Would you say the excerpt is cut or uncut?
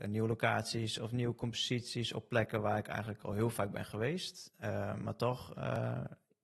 uncut